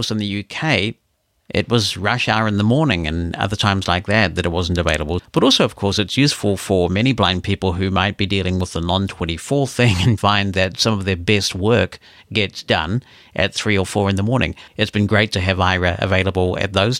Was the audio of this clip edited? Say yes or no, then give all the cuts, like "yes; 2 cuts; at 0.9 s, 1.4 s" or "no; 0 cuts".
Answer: yes; 3 cuts; at 5.2 s, 10.2 s, 14.7 s